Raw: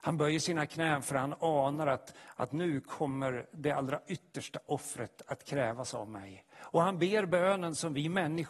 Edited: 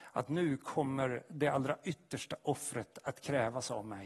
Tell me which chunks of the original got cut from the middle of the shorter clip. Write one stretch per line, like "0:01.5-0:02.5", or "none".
none